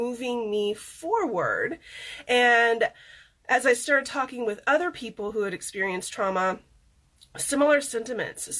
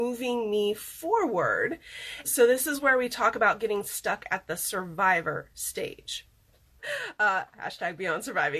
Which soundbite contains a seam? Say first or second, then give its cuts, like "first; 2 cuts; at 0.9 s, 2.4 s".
second; 2 cuts; at 2.2 s, 6.8 s